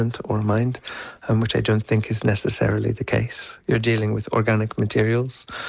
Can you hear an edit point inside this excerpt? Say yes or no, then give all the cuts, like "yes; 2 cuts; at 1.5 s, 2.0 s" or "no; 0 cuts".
no; 0 cuts